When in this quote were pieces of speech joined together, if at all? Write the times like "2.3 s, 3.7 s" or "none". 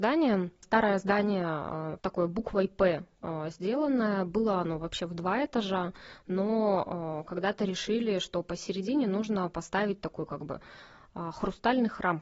2.0 s